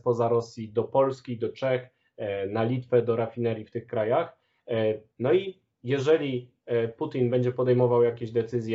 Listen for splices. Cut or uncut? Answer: cut